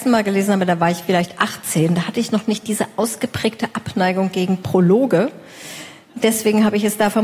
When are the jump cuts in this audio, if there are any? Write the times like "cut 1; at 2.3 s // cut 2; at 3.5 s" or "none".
cut 1; at 1.1 s